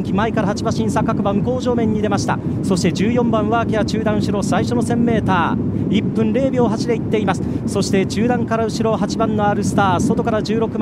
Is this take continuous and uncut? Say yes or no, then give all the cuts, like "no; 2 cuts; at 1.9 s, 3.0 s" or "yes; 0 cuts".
yes; 0 cuts